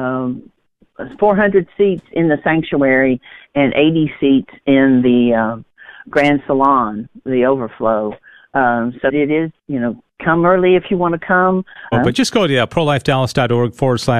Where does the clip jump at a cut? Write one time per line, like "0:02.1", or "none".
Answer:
0:09.1
0:11.9